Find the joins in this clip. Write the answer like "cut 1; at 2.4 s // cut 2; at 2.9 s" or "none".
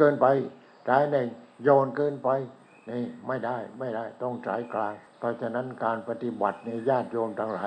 cut 1; at 5.1 s